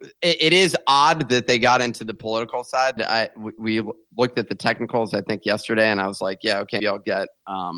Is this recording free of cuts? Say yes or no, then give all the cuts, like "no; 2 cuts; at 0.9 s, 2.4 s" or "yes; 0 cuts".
no; 2 cuts; at 3.0 s, 6.8 s